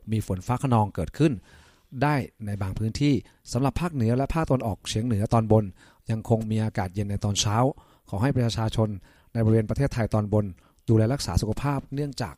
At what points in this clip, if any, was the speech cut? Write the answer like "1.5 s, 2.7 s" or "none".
none